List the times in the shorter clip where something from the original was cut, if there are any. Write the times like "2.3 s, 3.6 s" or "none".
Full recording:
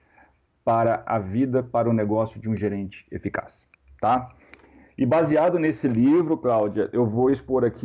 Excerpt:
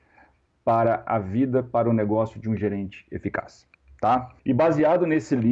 4.4 s